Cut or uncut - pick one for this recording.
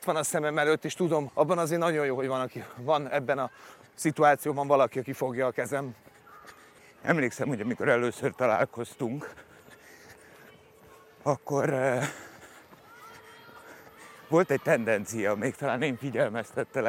cut